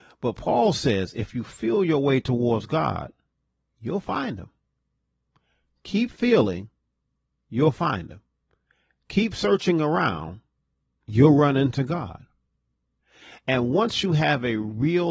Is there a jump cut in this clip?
no; 0 cuts

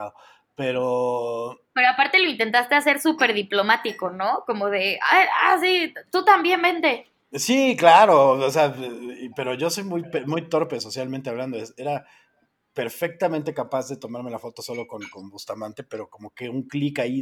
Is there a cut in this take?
no; 0 cuts

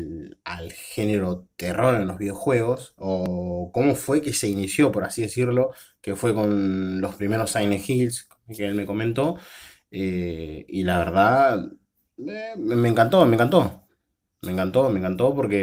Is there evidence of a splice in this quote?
no; 0 cuts

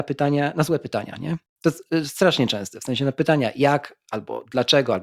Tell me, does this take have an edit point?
no; 0 cuts

